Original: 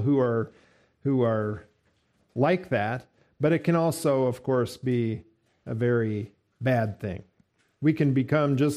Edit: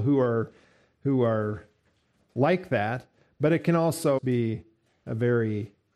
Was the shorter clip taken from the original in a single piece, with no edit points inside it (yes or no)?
no